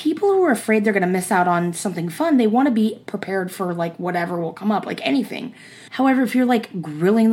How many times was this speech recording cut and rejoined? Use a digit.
1